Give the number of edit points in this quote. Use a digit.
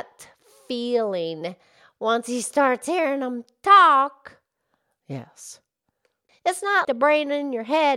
2